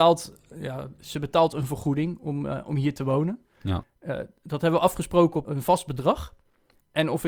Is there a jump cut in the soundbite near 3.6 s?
yes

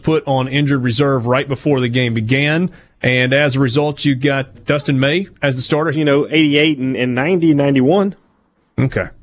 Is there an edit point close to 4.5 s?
yes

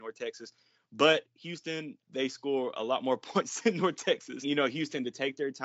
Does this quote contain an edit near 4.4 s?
yes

